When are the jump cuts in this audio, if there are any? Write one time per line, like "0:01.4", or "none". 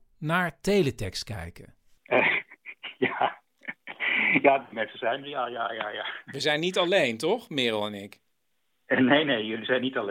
none